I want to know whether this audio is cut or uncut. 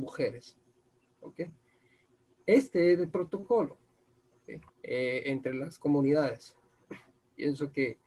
cut